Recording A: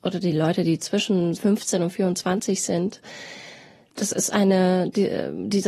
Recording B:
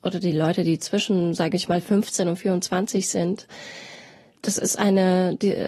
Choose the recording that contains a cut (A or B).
A